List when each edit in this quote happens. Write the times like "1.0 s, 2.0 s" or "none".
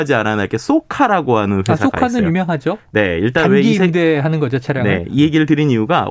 none